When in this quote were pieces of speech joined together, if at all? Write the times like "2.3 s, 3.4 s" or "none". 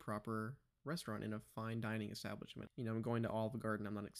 2.7 s

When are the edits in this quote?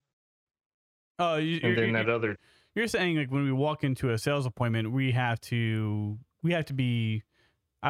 none

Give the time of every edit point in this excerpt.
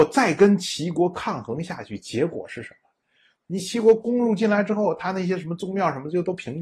3.4 s

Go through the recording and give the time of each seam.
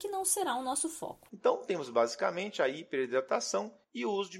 1.3 s

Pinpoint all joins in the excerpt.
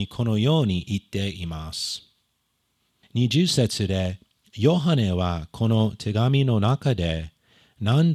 3.0 s

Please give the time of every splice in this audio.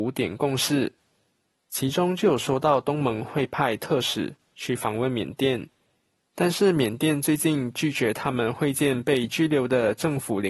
none

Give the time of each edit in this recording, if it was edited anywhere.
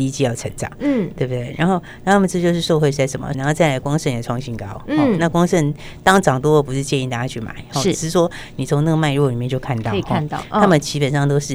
3.3 s

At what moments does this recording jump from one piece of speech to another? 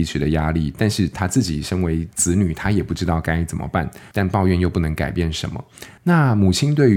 4.1 s, 6.0 s

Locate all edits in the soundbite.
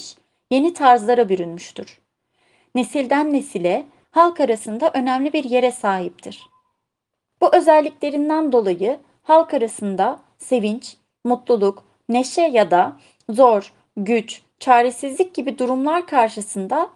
4.0 s, 7.3 s

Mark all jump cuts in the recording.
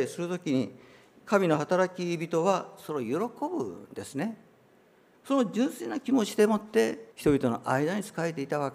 5.1 s, 7.1 s

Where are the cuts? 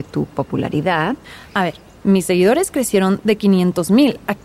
none

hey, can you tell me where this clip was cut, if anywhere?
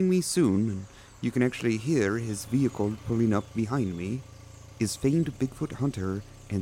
none

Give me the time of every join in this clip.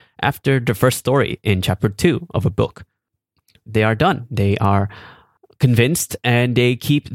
3.6 s

